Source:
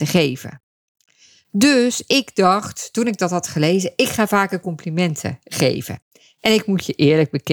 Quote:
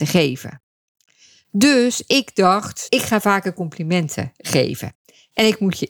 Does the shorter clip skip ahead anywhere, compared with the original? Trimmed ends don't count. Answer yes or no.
yes